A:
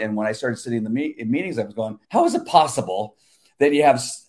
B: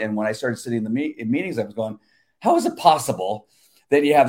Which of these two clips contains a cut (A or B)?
A